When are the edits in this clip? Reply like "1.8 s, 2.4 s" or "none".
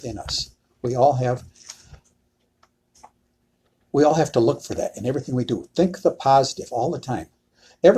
none